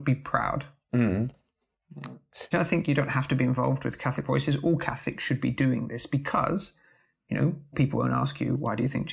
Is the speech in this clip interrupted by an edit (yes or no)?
yes